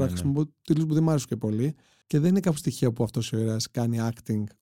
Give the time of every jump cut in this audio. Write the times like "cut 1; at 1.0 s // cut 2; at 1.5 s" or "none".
cut 1; at 2.0 s